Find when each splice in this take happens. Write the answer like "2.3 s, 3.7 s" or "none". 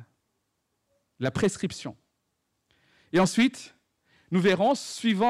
none